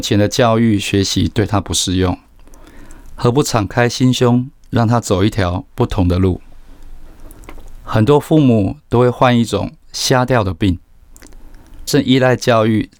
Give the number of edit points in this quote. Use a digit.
1